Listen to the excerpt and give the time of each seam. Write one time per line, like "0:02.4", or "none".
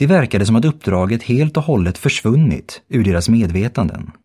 none